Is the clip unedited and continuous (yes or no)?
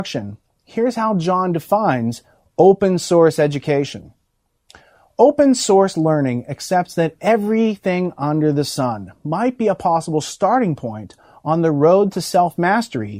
yes